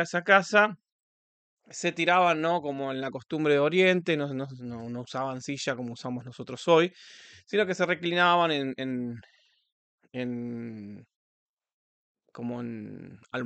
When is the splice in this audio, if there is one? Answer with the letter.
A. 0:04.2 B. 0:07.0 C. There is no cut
C